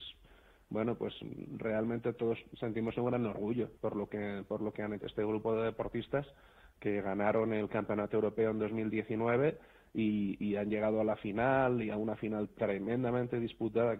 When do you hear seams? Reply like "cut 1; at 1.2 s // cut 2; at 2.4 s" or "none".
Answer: cut 1; at 5.0 s